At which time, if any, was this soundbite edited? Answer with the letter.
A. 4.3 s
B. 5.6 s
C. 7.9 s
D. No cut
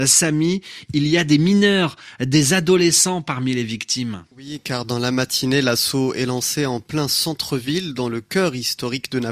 A